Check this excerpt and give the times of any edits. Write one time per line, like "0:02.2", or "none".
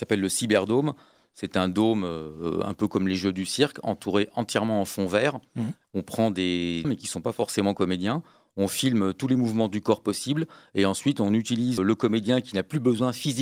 0:05.8
0:06.8
0:11.8